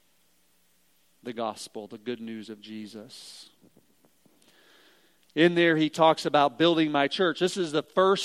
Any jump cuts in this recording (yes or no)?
no